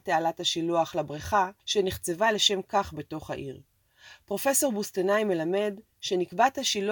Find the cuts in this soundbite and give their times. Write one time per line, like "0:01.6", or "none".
0:01.6